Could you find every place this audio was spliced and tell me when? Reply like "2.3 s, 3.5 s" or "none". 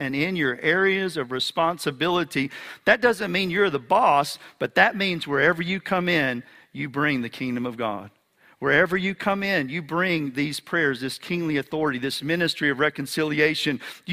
none